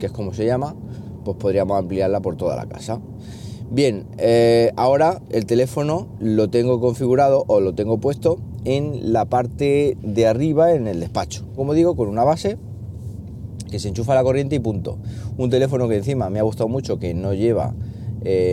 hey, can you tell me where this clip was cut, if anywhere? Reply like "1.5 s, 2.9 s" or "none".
11.6 s